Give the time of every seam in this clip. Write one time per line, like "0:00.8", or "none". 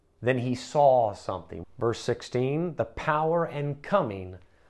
0:01.6